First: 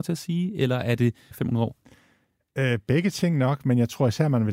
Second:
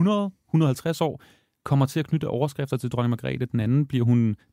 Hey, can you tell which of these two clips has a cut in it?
first; 1 cut; at 1.3 s

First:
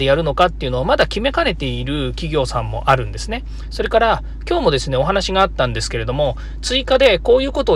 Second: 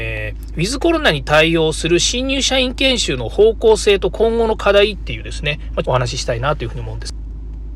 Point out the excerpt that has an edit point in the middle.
second; 1 cut; at 5.8 s

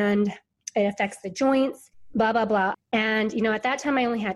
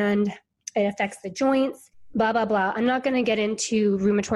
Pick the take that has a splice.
first; 1 cut; at 2.7 s

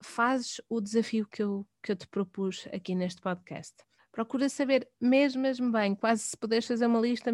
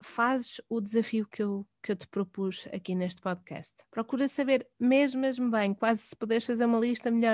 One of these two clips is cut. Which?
second; 1 cut; at 3.8 s

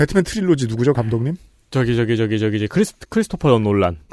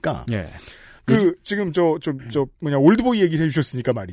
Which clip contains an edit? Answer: second; 2 cuts; at 1.0 s, 2.5 s

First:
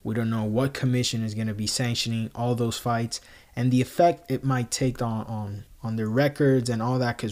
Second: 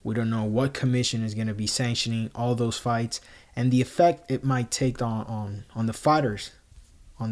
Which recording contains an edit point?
first; 1 cut; at 5.7 s

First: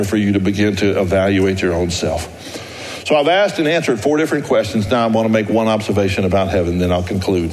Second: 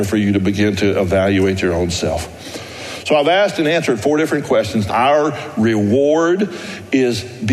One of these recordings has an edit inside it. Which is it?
second; 1 cut; at 4.9 s

